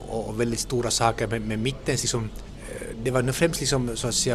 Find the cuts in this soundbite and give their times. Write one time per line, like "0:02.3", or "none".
none